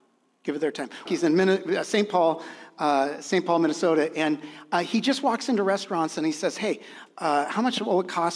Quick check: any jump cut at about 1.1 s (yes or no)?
yes